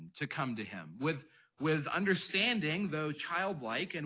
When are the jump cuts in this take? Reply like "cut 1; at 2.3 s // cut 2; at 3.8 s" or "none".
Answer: none